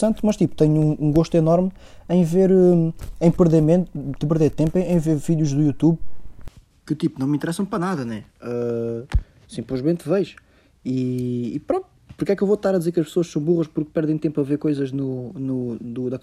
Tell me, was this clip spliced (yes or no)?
no